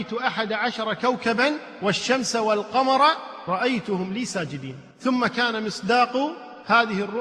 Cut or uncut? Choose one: cut